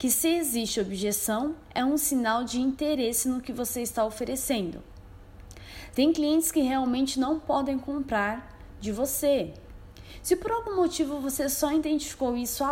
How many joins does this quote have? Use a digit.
1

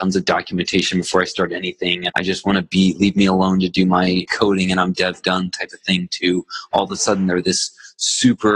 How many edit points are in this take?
2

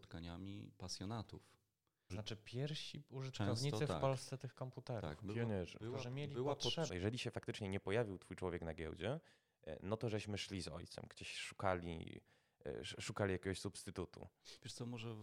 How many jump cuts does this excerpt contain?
2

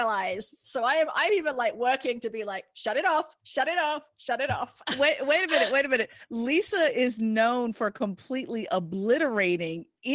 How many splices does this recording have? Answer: 0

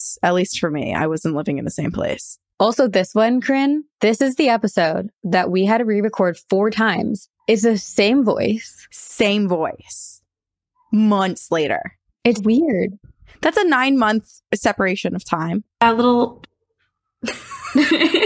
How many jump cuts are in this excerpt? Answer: 3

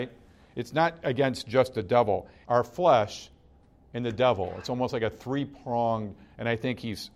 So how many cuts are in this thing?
1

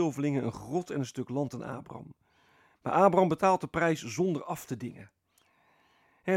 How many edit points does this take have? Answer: 1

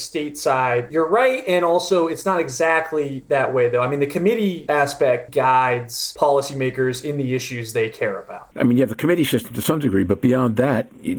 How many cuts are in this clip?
2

